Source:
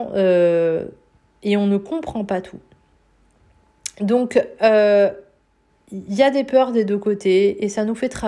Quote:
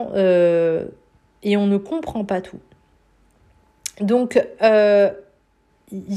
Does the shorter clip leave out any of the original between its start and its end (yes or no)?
no